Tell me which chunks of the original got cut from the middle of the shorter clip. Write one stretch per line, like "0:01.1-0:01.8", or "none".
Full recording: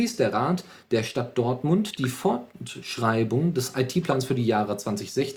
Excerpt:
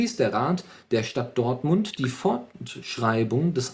none